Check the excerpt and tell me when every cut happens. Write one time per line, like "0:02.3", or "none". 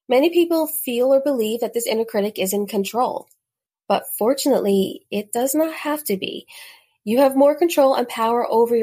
none